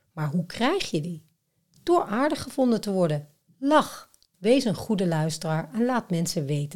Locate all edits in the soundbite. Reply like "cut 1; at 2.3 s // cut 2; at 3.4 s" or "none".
cut 1; at 4.3 s